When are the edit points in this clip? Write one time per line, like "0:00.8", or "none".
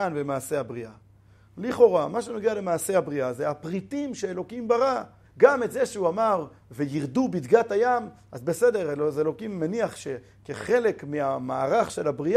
0:05.3